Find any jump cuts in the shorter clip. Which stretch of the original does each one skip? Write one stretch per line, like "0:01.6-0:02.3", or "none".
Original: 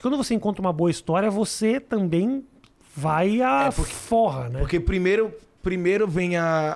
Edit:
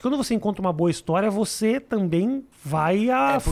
0:02.5-0:02.8